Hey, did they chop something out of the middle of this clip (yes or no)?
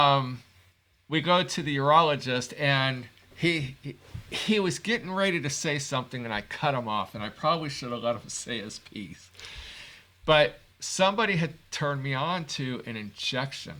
no